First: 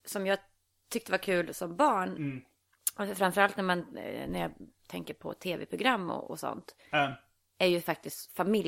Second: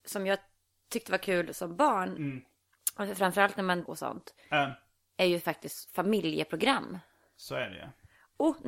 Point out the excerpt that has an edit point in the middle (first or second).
second